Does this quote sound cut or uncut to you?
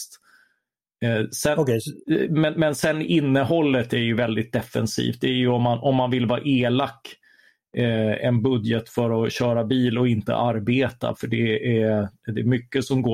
uncut